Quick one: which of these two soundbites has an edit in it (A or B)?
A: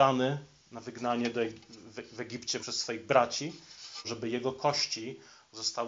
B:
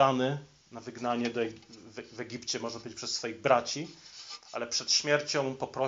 A